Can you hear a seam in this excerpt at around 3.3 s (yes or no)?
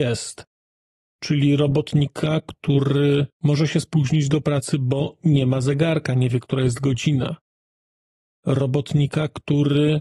yes